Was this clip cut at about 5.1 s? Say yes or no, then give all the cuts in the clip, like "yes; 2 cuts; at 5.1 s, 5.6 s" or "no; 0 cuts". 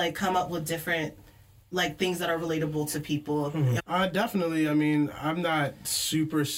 no; 1 cut; at 3.8 s